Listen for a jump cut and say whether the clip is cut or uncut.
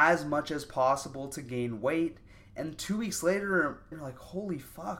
cut